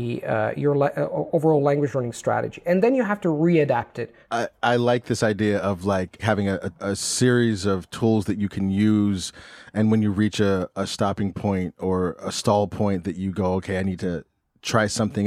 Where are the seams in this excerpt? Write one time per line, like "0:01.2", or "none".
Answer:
none